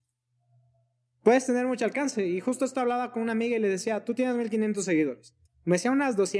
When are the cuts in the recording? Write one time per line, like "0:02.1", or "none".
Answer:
0:05.4